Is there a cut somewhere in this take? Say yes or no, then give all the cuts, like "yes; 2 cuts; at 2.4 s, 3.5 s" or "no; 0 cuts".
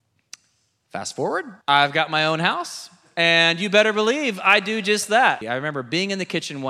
yes; 2 cuts; at 1.6 s, 5.4 s